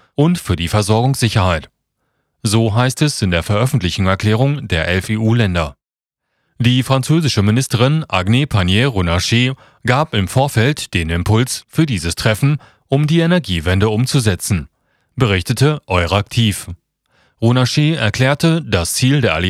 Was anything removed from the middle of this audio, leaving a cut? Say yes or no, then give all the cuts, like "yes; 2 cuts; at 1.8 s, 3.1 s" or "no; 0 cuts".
no; 0 cuts